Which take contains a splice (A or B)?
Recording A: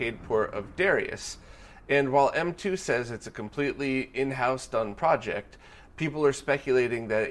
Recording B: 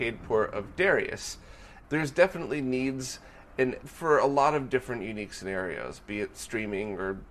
B